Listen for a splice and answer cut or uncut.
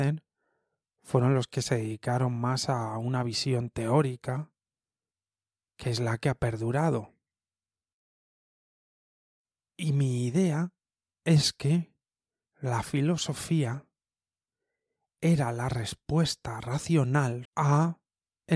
cut